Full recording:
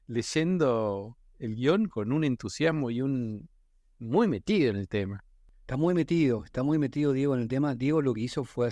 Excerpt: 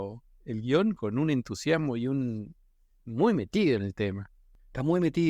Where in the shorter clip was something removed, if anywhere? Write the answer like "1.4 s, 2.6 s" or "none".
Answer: none